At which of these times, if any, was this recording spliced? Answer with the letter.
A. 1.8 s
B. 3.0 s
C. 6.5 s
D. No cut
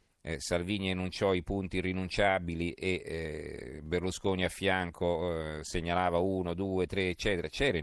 D